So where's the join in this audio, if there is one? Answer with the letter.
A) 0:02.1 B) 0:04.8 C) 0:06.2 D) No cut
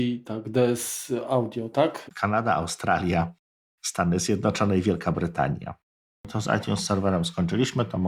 A